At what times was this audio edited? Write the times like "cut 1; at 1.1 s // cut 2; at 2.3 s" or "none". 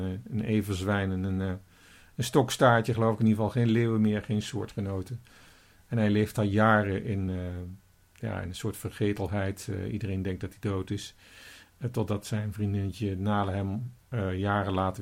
none